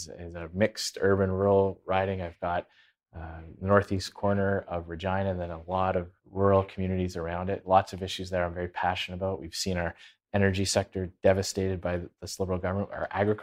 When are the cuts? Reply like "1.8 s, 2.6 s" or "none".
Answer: 6.2 s